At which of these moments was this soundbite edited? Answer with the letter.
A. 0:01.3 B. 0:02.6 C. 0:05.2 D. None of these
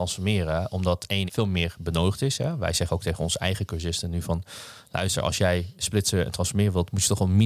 A